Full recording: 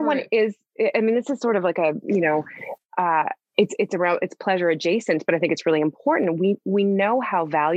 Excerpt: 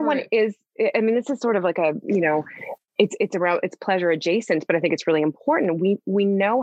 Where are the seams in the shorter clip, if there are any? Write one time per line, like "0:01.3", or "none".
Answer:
0:02.9